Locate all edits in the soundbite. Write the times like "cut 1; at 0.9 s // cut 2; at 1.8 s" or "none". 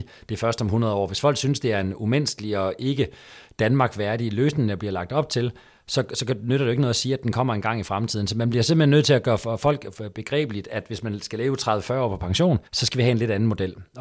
cut 1; at 12.7 s